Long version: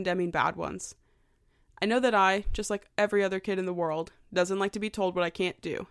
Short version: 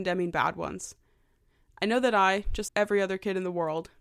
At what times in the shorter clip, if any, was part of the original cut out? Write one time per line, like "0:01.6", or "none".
0:02.7